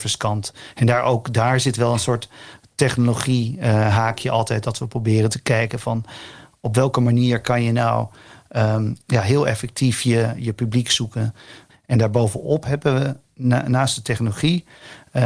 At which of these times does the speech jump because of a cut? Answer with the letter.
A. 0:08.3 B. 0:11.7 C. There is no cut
B